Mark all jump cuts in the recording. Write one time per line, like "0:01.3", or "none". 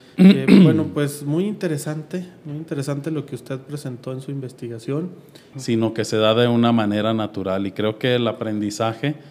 0:05.5